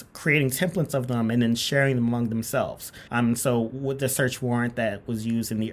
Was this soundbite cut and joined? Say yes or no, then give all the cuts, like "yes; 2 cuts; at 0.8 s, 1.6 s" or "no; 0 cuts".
yes; 1 cut; at 3.1 s